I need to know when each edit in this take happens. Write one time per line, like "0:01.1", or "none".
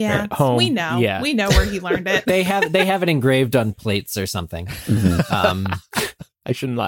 none